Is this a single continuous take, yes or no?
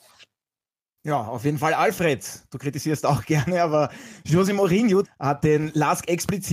no